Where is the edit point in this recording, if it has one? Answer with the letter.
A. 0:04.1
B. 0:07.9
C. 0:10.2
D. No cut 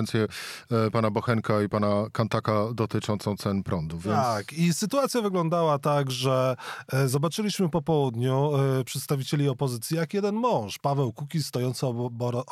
D